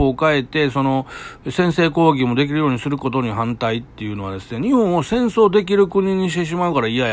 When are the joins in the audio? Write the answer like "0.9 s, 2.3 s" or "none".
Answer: none